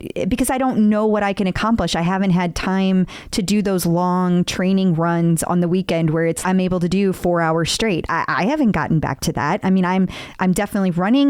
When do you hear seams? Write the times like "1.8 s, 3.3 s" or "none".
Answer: 6.4 s